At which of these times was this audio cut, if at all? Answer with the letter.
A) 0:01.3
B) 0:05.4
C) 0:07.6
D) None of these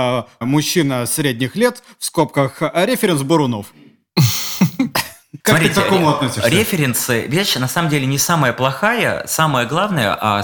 B